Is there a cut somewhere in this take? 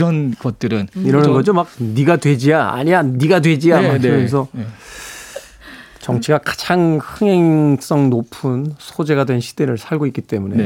no; 0 cuts

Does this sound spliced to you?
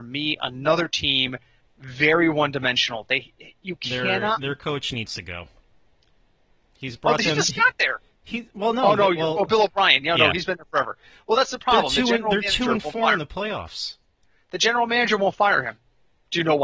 no; 0 cuts

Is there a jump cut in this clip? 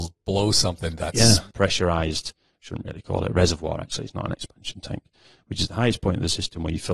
yes; 1 cut; at 1.5 s

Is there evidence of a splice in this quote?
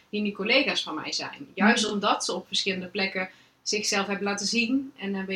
no; 0 cuts

